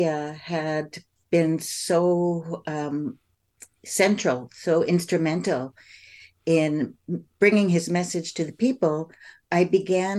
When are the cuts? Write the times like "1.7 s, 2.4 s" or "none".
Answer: none